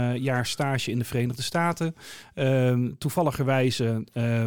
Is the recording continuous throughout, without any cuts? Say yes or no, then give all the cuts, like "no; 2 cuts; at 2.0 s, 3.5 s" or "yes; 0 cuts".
yes; 0 cuts